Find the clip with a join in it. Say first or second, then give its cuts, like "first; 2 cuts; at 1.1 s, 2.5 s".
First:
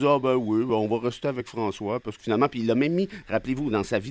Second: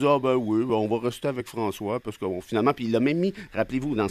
first; 1 cut; at 2.2 s